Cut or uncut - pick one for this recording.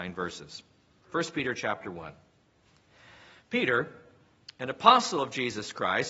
uncut